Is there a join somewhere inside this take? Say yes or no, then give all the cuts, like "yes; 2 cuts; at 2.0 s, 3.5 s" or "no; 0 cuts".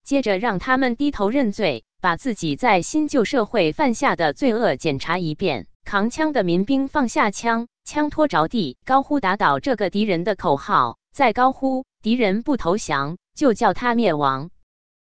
yes; 2 cuts; at 5.7 s, 8.8 s